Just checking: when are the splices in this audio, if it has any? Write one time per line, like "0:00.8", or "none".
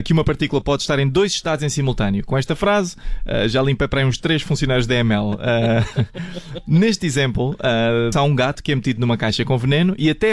0:08.1